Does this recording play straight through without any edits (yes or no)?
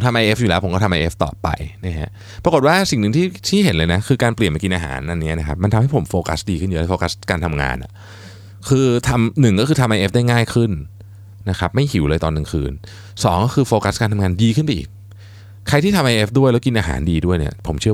yes